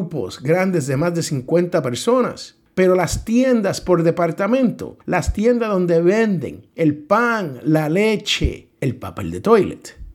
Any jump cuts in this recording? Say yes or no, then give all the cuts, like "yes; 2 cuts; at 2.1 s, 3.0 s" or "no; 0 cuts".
no; 0 cuts